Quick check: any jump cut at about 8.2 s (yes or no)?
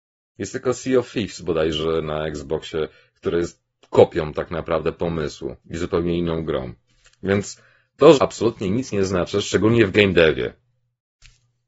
yes